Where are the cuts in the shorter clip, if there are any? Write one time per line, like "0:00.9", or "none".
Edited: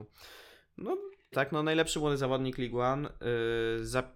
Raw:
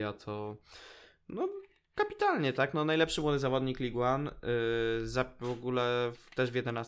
0:01.3